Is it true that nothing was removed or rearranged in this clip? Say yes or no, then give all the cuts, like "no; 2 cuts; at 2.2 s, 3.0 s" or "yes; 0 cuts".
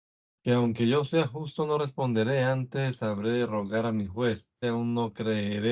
no; 1 cut; at 4.6 s